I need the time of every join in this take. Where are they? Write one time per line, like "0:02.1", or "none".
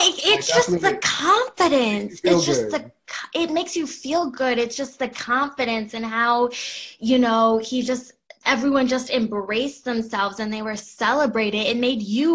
none

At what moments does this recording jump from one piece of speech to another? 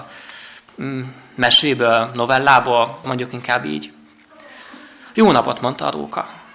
0:03.0

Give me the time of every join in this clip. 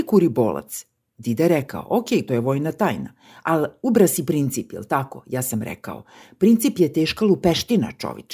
0:02.3

